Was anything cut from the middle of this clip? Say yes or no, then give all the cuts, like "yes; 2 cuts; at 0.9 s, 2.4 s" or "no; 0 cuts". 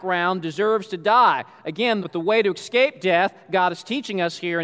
yes; 1 cut; at 2.0 s